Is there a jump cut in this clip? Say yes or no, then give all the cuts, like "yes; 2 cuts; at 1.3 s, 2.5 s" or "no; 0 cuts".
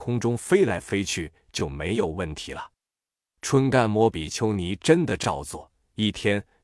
no; 0 cuts